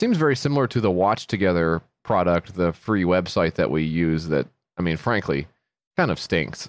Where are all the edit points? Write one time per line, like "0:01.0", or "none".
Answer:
none